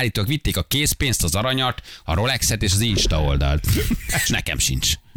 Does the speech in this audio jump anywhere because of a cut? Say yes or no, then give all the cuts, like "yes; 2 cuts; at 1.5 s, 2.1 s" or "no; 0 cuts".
yes; 1 cut; at 4.2 s